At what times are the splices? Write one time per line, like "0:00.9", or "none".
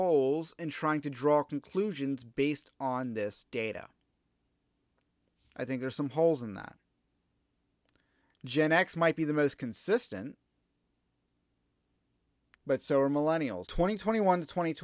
0:12.5
0:13.6